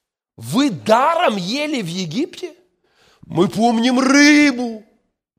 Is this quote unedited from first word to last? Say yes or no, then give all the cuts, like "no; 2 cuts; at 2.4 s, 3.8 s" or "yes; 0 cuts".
no; 1 cut; at 3.2 s